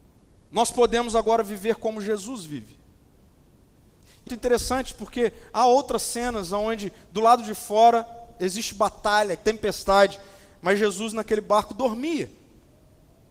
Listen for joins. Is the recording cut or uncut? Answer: cut